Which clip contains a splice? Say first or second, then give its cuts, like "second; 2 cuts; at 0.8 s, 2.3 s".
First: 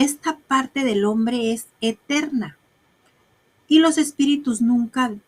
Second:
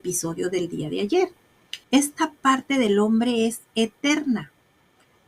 second; 1 cut; at 1.8 s